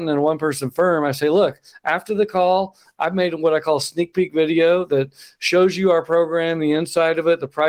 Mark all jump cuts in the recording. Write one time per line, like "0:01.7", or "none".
none